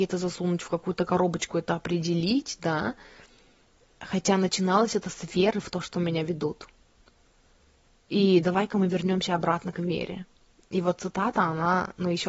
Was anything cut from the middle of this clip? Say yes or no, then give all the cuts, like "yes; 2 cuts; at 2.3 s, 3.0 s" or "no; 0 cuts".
no; 0 cuts